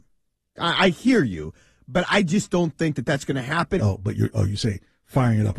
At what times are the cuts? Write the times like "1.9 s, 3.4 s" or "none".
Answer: 3.8 s